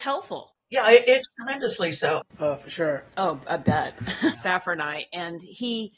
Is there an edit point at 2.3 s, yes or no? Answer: yes